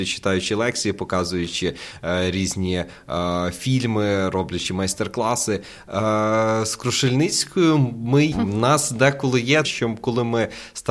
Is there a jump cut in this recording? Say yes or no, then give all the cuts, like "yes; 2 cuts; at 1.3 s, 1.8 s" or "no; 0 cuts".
yes; 2 cuts; at 8.3 s, 9.6 s